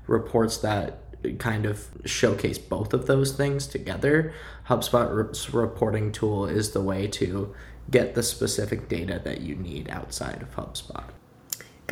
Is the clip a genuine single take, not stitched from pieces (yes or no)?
yes